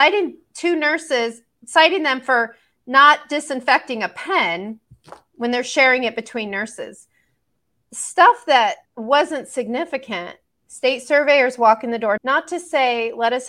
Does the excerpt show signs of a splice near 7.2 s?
no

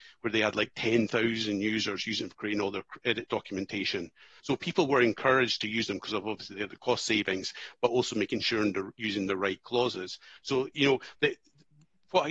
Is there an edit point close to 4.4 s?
yes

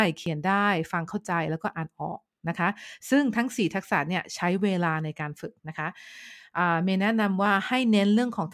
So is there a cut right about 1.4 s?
no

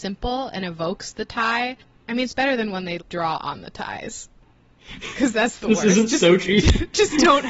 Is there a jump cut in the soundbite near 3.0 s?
yes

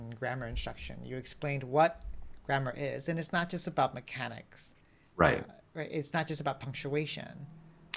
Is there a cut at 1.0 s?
no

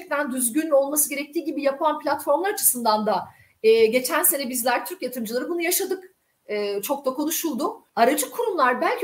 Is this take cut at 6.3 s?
no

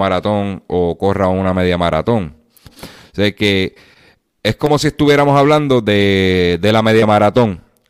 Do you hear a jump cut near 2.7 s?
yes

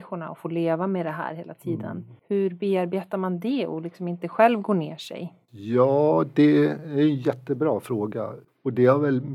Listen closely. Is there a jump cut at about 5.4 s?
no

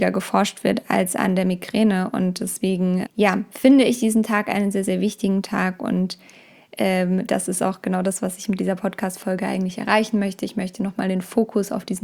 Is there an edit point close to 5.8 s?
no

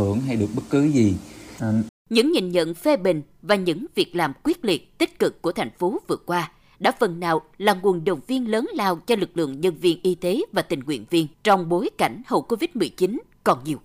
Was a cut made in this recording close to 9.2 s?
no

